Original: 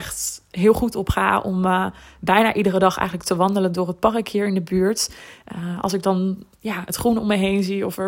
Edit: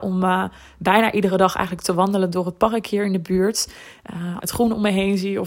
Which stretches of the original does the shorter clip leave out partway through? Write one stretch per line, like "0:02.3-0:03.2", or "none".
0:05.8-0:06.9